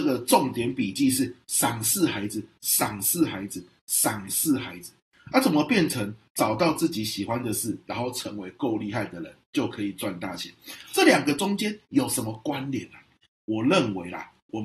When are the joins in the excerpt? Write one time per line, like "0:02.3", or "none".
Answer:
0:13.2